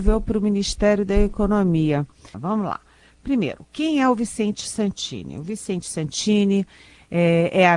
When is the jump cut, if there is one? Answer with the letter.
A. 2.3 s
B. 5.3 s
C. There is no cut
A